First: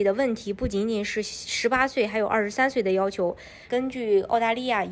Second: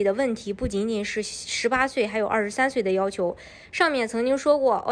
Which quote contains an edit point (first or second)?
first